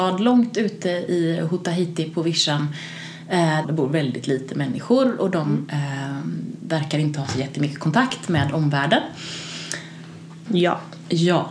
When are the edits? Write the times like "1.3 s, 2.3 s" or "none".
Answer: 3.6 s, 10.5 s